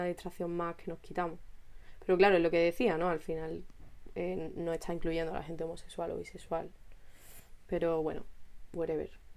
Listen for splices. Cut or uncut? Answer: uncut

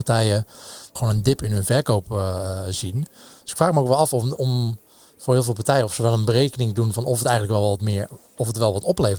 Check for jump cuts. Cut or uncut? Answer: cut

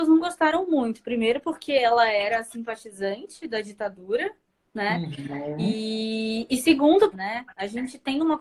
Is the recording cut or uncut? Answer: cut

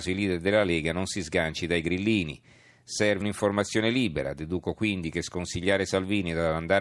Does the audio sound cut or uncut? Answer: cut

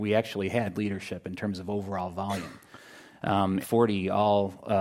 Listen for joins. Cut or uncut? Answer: cut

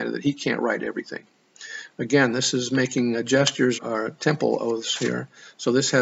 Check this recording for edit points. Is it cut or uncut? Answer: cut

